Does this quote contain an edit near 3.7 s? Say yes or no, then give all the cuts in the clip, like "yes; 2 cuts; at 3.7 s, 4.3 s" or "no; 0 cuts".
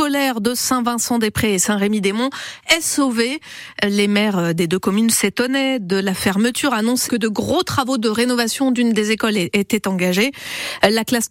no; 1 cut; at 7.1 s